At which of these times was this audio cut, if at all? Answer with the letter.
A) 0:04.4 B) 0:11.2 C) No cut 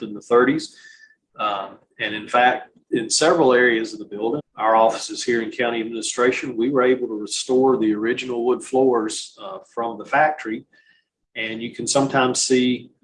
A